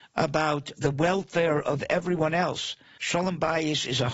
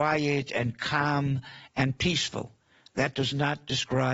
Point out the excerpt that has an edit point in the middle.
first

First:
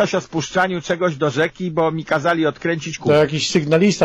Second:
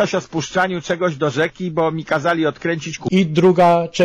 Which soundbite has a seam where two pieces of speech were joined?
second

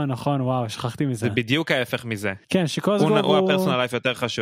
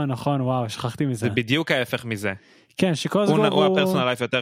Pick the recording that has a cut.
first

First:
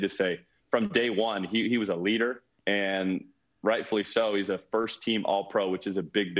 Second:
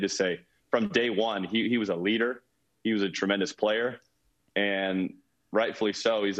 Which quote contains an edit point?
first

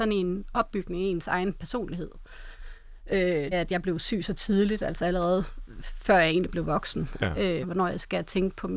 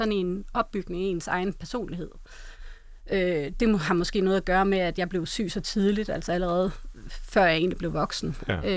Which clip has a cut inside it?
first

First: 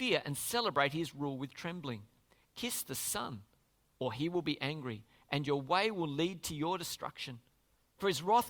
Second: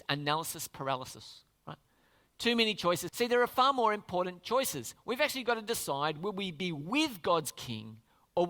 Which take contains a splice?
second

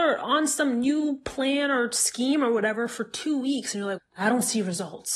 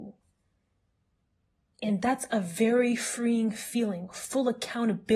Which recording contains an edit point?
first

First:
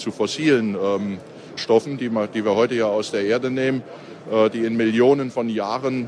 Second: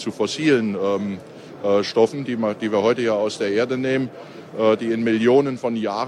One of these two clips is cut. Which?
first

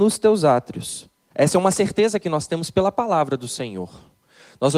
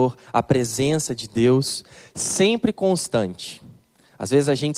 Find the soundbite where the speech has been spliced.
first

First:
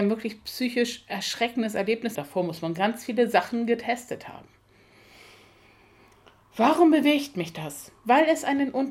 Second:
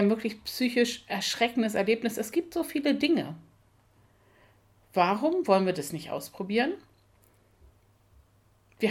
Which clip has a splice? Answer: first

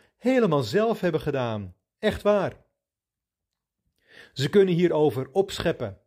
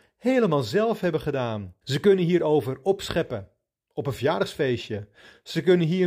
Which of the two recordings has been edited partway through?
second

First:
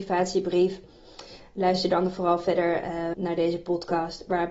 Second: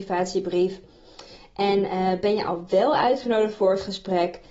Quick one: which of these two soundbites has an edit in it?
first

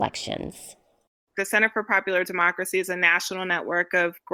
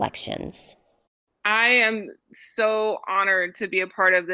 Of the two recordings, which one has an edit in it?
first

